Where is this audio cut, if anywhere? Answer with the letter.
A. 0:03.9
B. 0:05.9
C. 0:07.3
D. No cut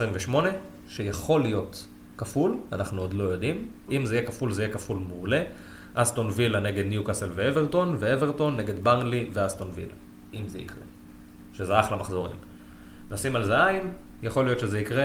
A